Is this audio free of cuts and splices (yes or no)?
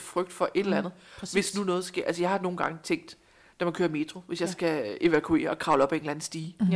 yes